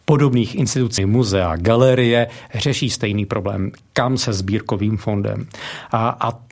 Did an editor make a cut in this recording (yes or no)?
yes